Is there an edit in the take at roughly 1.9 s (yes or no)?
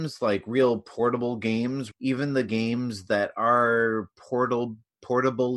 yes